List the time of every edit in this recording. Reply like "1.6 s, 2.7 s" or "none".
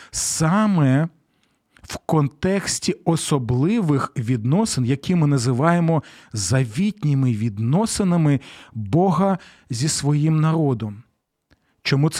none